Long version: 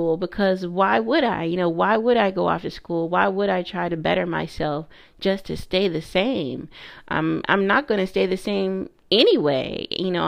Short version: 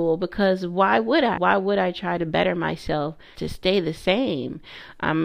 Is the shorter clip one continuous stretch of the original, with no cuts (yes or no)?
no